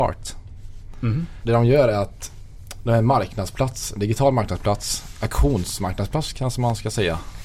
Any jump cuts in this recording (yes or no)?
yes